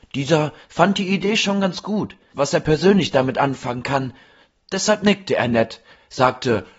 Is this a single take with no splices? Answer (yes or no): no